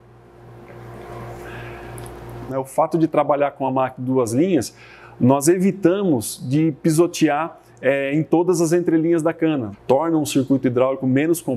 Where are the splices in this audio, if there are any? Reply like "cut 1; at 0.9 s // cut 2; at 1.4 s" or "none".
cut 1; at 2.5 s // cut 2; at 9.7 s